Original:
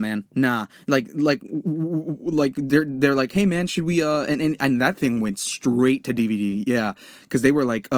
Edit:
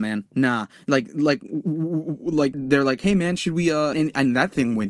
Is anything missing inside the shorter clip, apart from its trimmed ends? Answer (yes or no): yes